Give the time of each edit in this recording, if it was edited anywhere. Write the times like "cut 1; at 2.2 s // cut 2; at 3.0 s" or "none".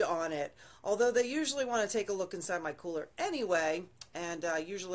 none